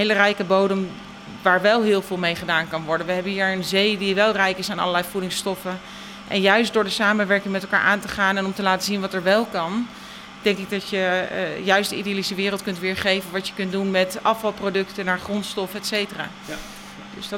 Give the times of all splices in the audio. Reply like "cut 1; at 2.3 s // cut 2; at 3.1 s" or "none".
none